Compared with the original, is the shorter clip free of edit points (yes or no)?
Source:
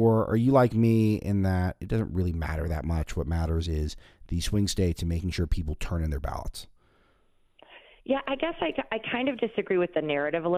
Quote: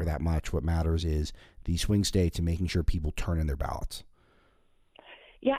yes